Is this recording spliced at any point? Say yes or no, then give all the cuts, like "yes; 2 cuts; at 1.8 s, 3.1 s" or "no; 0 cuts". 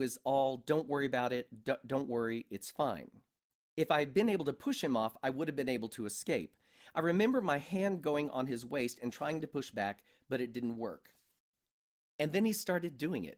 no; 0 cuts